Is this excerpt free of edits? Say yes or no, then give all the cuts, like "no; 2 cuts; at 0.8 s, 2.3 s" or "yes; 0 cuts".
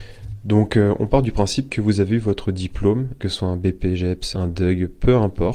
no; 2 cuts; at 3.2 s, 4.3 s